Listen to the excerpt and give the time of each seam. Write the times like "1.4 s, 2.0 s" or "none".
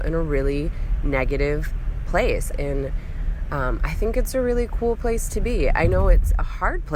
2.5 s

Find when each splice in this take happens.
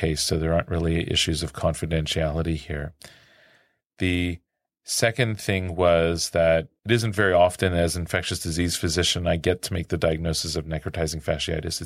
none

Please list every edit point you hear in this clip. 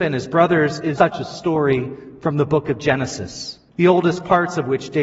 1.0 s, 3.7 s

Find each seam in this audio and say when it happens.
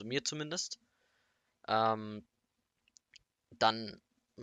none

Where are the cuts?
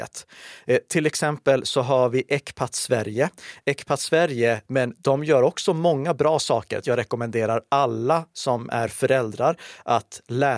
4.6 s, 6.8 s

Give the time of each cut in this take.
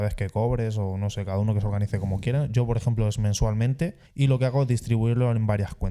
4.1 s

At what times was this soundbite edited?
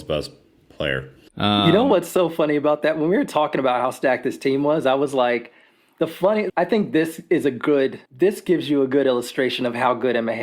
1.3 s, 6.5 s, 8.1 s

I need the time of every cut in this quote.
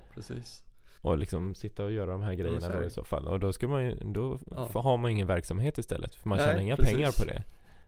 none

